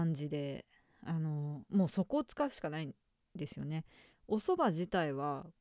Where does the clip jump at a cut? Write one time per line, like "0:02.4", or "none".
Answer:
0:04.1